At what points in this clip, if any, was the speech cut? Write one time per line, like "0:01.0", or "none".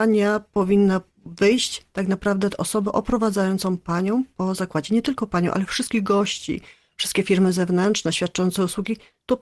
none